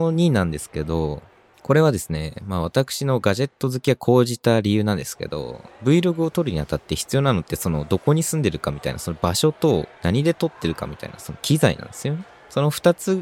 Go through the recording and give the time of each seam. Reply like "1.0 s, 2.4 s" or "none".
none